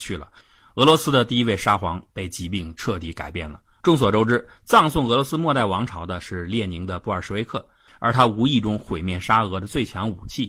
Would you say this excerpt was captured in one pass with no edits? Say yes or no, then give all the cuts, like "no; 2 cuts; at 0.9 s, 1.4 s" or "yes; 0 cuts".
no; 2 cuts; at 3.8 s, 7.9 s